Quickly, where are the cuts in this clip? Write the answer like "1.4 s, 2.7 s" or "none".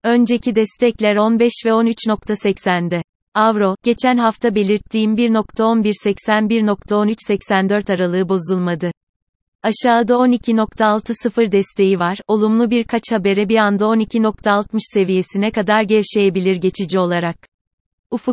3.8 s, 9.5 s